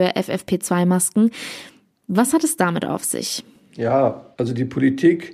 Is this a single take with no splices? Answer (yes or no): yes